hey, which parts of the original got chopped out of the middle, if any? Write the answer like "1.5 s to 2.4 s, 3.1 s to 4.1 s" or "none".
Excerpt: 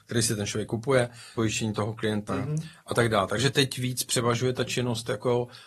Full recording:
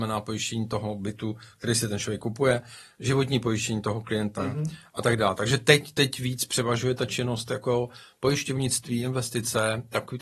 2.9 s to 3.5 s, 5.6 s to 5.9 s